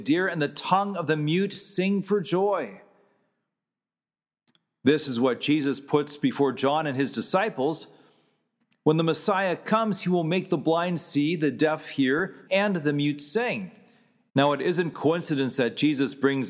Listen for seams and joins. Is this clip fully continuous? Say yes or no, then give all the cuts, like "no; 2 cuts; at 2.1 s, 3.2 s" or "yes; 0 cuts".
no; 2 cuts; at 12.5 s, 14.3 s